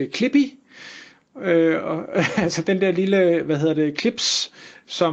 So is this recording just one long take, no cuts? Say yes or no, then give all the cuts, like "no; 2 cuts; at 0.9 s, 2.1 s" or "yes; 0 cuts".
yes; 0 cuts